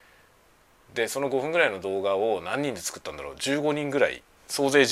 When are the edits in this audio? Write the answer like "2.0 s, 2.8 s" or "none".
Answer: none